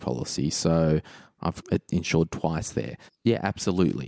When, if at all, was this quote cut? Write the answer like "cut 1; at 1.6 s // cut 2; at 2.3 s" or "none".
cut 1; at 1.6 s // cut 2; at 3.1 s